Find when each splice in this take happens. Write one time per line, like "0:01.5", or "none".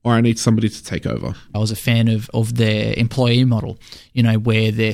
0:01.5

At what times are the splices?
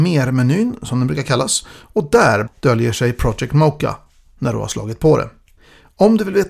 0:02.5

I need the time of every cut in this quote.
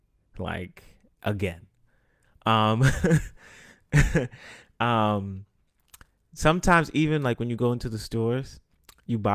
none

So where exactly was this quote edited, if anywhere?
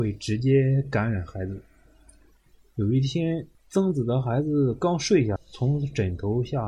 0:03.5
0:05.4

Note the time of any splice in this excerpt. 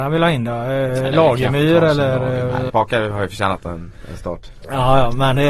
0:02.7
0:04.6

